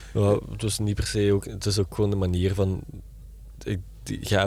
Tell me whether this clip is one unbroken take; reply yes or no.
yes